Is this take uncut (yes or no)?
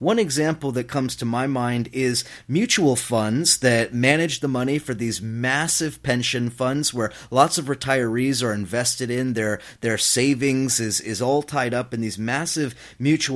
yes